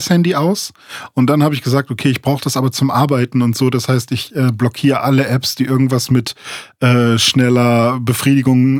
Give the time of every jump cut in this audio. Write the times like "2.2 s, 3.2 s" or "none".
none